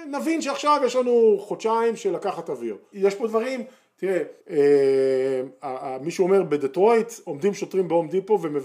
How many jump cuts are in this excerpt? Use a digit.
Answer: 2